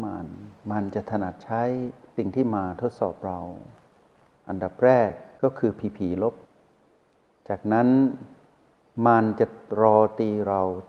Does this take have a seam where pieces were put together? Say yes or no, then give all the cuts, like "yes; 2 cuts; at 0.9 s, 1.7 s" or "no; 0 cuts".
no; 0 cuts